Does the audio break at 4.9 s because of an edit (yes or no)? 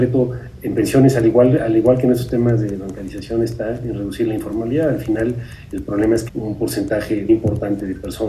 no